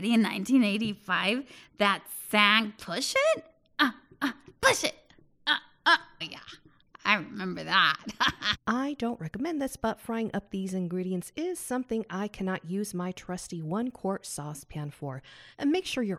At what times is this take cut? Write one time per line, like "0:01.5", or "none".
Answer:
0:06.2
0:08.5